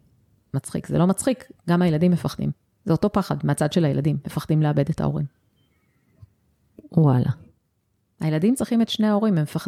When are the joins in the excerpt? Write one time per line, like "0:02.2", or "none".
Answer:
none